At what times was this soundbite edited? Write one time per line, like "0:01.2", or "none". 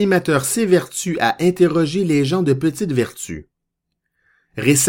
none